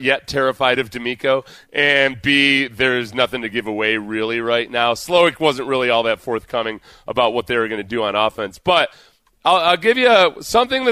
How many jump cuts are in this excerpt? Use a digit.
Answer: 0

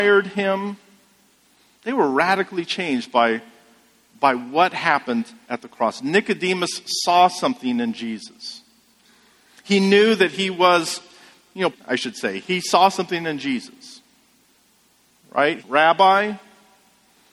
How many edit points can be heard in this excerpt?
2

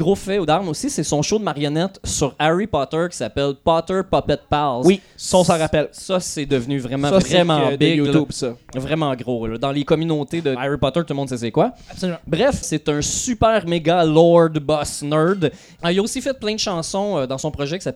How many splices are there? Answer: 3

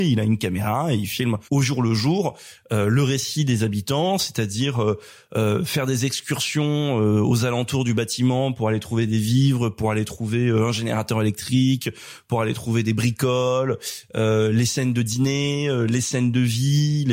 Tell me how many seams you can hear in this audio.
1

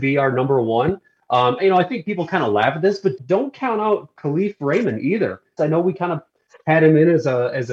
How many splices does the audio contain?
3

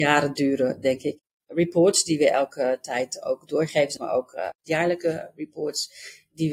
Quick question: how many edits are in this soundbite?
1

